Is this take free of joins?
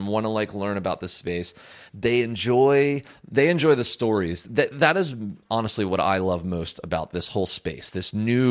no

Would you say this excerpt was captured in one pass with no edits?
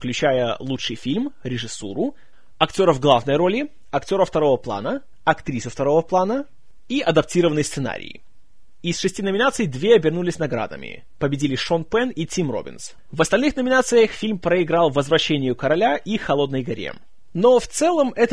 no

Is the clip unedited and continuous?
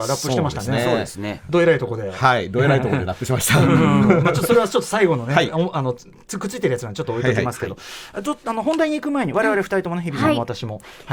yes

